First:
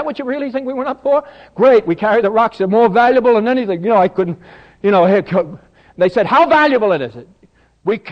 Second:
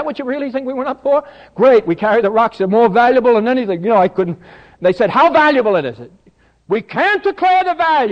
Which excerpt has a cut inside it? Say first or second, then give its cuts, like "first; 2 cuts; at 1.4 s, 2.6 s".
second; 1 cut; at 4.7 s